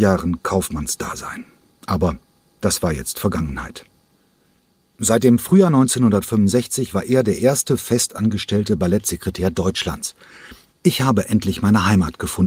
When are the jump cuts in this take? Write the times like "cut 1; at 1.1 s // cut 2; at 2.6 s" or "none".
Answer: cut 1; at 10.7 s